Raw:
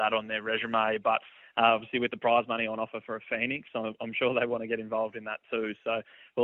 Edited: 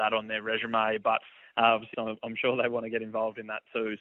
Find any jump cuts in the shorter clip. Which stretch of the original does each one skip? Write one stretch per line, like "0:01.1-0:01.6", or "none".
0:01.9-0:03.7

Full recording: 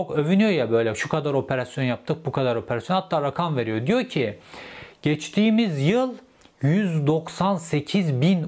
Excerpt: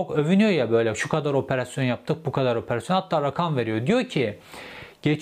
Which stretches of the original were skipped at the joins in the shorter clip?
none

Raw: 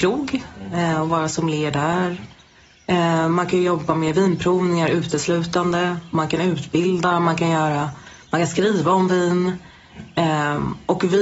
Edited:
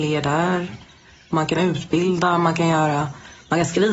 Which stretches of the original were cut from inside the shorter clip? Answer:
0:02.8-0:06.1

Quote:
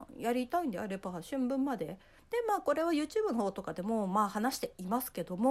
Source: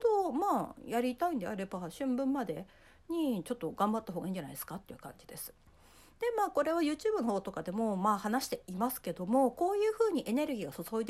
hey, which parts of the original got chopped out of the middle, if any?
0:02.9-0:06.1

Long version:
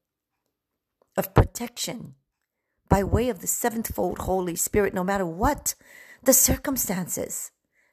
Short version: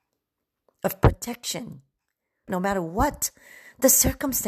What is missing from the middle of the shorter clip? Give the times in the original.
0:02.8-0:04.9

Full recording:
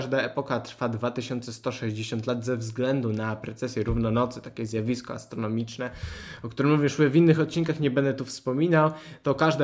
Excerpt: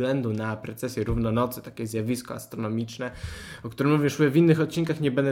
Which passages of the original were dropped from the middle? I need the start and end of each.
none

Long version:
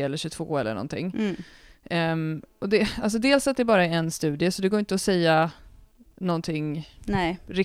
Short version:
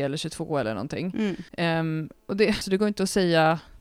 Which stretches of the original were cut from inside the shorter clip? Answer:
0:01.5-0:01.8
0:02.9-0:04.5

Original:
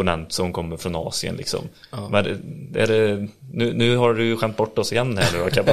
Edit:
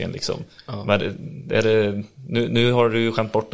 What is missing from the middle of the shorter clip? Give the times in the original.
none

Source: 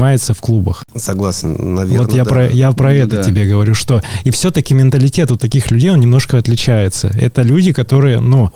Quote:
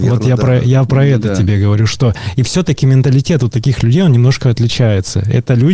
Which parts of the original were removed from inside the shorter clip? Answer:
none

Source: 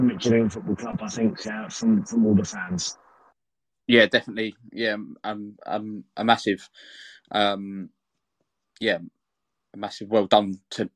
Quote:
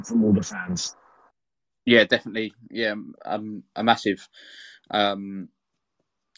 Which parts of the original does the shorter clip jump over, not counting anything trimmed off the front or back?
0:05.2-0:05.6

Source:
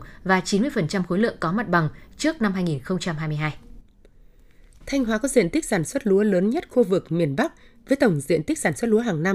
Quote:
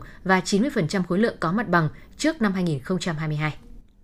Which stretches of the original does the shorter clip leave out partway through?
none

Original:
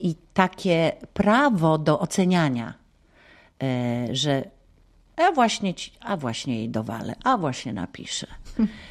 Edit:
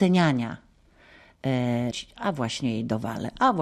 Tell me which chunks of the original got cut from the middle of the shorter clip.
0:04.1-0:05.8

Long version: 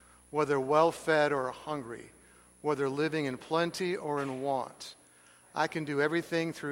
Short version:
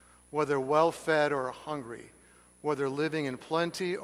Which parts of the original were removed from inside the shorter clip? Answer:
none

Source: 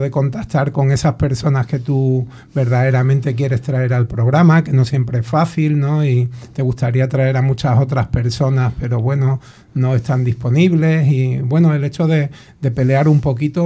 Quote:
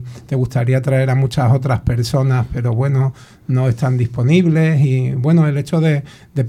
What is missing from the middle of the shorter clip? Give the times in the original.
none

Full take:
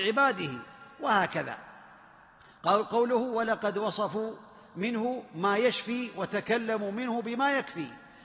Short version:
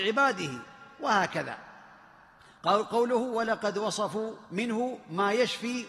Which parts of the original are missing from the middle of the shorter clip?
0:04.4-0:04.7

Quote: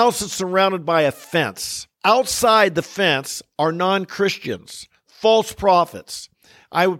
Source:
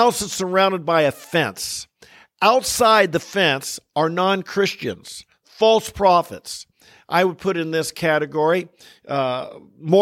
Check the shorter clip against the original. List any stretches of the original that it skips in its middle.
0:01.9-0:02.3

